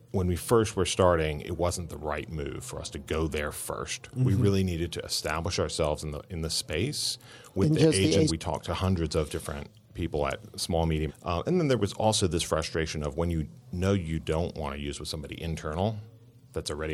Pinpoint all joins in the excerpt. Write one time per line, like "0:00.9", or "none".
0:08.3
0:11.1